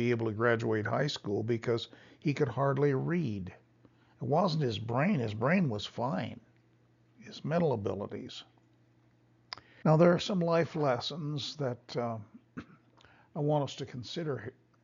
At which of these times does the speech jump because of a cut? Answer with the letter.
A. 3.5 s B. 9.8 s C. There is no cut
B